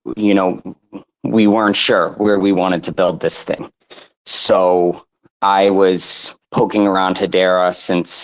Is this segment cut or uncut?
uncut